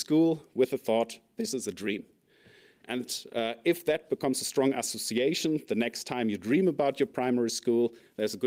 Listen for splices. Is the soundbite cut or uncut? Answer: uncut